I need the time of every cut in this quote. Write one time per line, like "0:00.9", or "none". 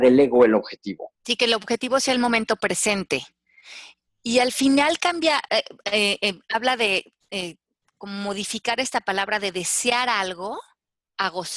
0:01.2